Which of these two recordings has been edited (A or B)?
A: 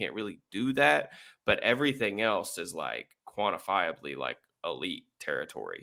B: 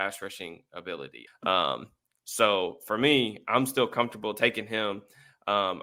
B